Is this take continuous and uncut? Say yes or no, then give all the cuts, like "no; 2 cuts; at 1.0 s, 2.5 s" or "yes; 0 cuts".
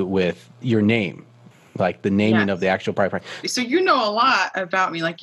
no; 1 cut; at 3.4 s